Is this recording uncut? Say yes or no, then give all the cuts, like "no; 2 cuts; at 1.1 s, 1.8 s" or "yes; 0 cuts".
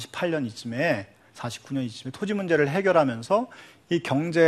yes; 0 cuts